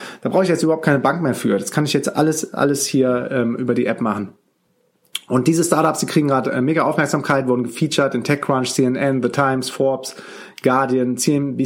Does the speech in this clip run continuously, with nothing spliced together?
yes; 0 cuts

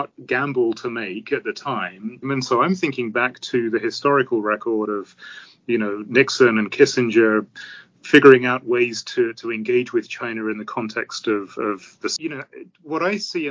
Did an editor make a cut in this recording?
yes; 2 cuts; at 2.2 s, 12.2 s

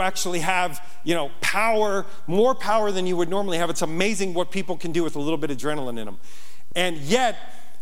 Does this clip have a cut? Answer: no; 0 cuts

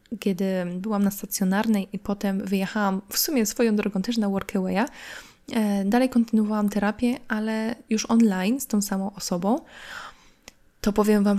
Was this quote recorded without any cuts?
yes; 0 cuts

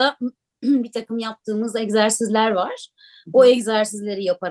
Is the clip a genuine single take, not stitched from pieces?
yes; 0 cuts

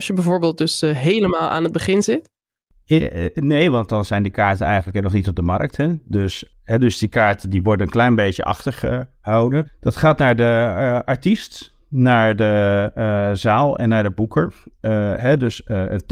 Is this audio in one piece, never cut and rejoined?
no; 1 cut; at 9.6 s

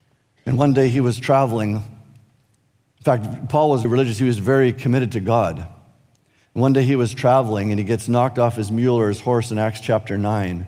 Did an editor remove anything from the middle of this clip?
yes; 1 cut; at 3.8 s

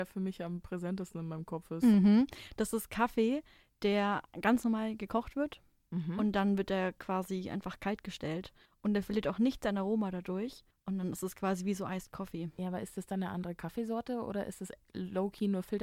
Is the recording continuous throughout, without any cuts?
yes; 0 cuts

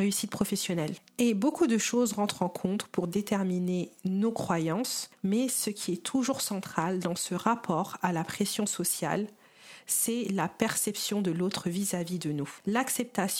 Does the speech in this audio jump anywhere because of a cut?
no; 0 cuts

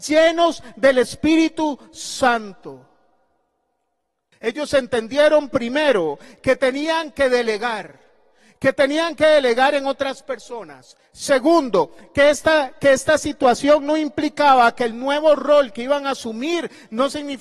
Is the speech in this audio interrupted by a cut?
yes; 1 cut; at 4.3 s

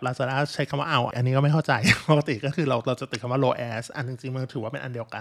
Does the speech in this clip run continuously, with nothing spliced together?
no; 1 cut; at 1.1 s

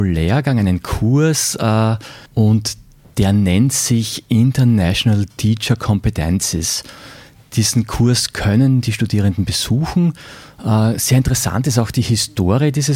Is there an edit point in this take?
yes; 1 cut; at 2.3 s

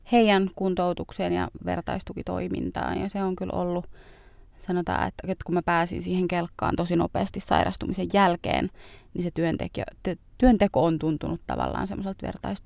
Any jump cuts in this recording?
no; 0 cuts

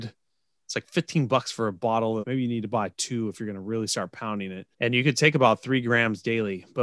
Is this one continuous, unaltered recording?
no; 2 cuts; at 2.2 s, 4.7 s

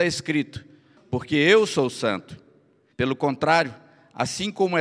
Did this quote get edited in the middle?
yes; 2 cuts; at 1.0 s, 2.9 s

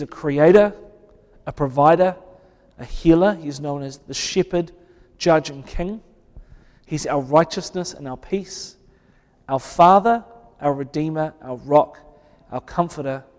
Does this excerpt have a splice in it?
no; 0 cuts

